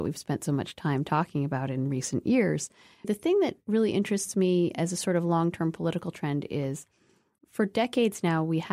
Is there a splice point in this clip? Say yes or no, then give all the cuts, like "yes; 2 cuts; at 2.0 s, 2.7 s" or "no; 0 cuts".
yes; 2 cuts; at 3.0 s, 7.4 s